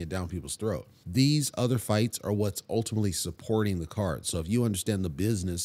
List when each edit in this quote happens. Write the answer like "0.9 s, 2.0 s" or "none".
1.0 s